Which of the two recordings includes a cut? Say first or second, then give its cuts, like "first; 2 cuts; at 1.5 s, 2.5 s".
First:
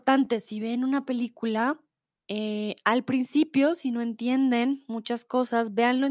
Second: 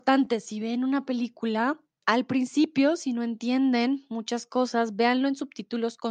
second; 1 cut; at 2.0 s